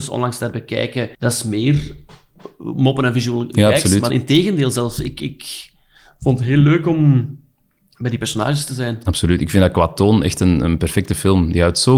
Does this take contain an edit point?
yes; 2 cuts; at 1.1 s, 4.1 s

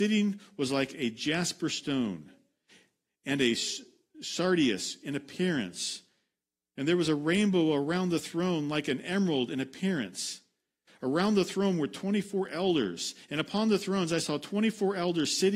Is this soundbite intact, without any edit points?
yes; 0 cuts

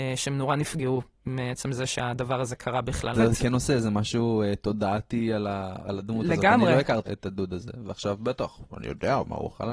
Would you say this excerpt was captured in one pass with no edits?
no; 2 cuts; at 3.1 s, 7.0 s

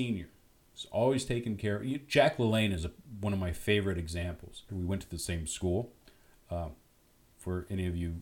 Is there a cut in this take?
yes; 1 cut; at 4.7 s

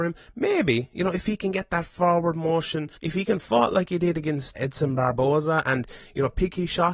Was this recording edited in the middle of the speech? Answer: yes; 2 cuts; at 3.0 s, 4.5 s

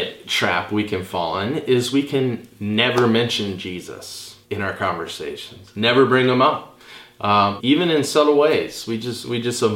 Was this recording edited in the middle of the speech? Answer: yes; 2 cuts; at 4.4 s, 7.6 s

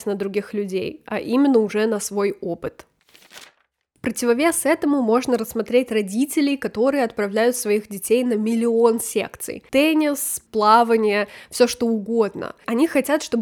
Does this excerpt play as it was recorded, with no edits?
yes; 0 cuts

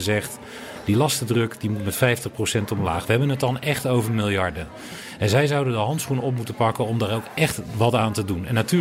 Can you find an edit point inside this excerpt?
no; 0 cuts

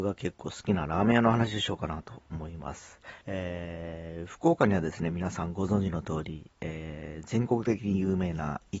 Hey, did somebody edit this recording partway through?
yes; 1 cut; at 3.2 s

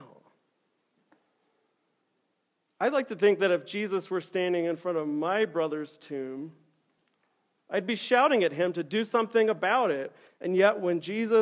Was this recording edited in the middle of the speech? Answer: yes; 1 cut; at 10.3 s

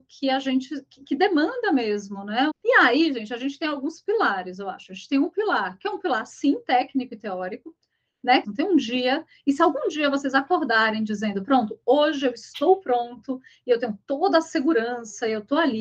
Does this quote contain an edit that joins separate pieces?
yes; 2 cuts; at 2.5 s, 8.4 s

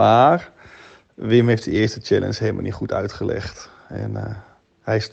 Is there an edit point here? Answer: no; 0 cuts

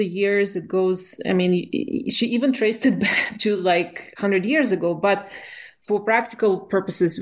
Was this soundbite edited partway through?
no; 0 cuts

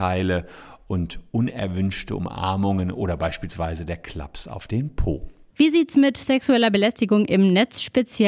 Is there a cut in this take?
no; 0 cuts

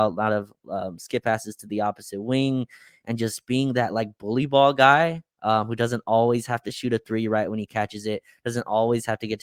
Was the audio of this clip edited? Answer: no; 0 cuts

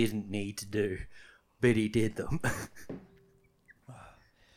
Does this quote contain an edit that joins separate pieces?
no; 0 cuts

